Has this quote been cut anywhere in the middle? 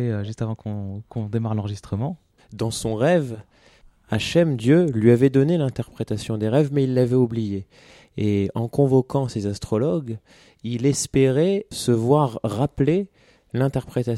yes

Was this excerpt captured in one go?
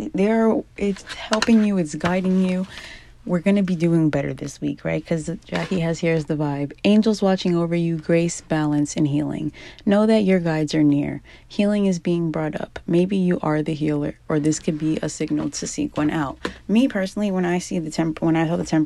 yes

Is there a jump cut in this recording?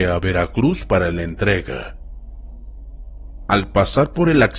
no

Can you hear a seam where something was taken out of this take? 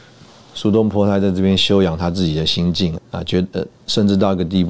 yes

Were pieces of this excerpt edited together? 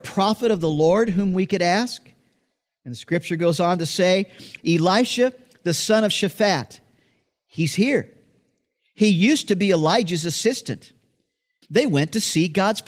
yes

